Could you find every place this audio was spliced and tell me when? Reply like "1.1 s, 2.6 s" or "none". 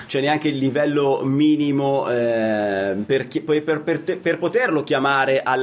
none